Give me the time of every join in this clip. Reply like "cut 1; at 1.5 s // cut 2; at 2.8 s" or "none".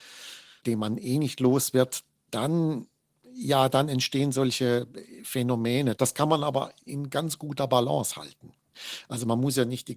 cut 1; at 6.0 s